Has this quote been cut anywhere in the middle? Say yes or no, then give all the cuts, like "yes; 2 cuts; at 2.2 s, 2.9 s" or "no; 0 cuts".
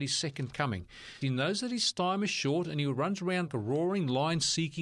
yes; 2 cuts; at 1.2 s, 3.5 s